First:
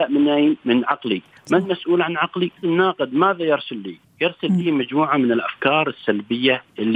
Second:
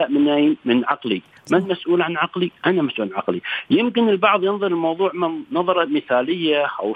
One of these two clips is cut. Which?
first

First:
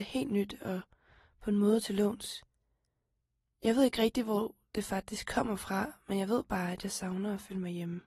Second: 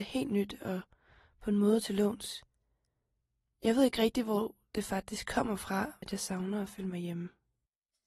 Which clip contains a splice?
second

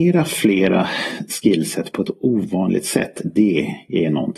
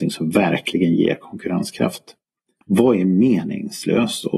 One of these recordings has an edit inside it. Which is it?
second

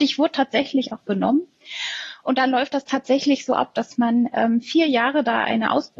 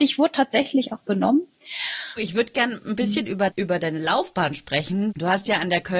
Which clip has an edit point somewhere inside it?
second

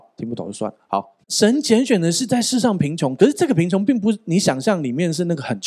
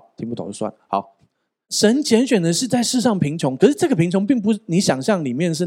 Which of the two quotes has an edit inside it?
first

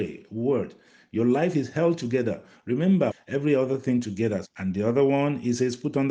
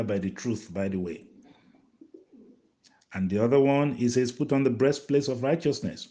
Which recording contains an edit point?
first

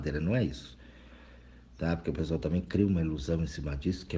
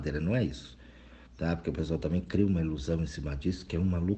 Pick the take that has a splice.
second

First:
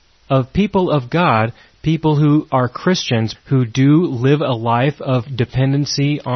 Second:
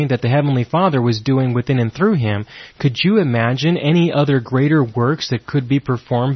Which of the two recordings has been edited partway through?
first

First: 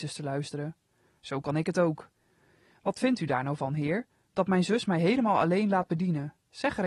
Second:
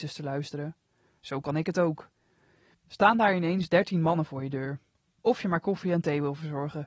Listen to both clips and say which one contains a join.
second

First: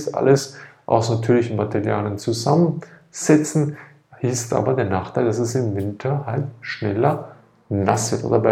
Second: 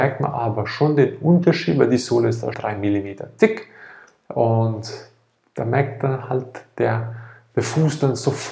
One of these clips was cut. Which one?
second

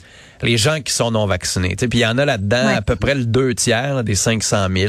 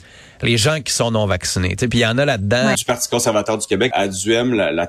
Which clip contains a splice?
second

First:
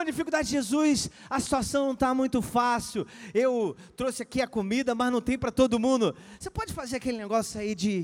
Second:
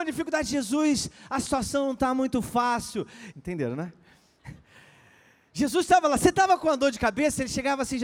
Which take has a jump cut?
second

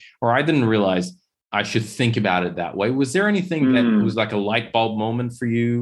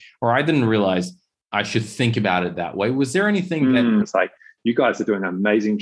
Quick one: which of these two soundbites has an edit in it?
second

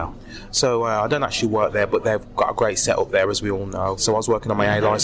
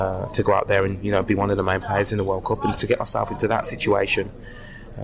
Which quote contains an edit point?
first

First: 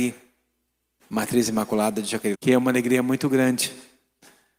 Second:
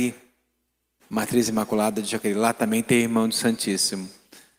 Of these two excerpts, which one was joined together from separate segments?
first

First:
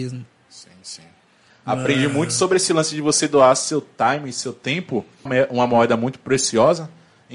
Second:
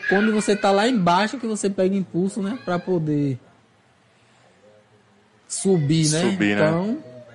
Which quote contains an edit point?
first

